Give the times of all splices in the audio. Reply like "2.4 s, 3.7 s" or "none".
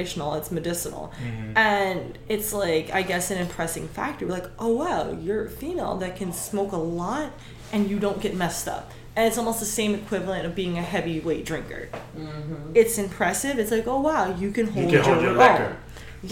none